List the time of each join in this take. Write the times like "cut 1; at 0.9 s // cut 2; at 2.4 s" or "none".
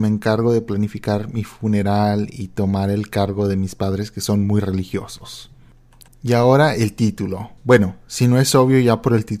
cut 1; at 6.1 s // cut 2; at 7.6 s